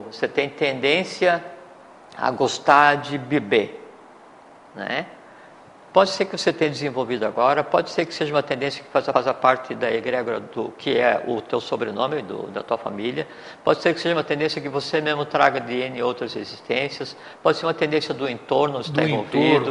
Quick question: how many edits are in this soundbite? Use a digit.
1